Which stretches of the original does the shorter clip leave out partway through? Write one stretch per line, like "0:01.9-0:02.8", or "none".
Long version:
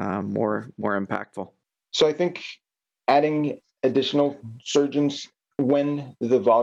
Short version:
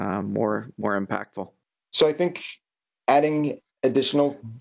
none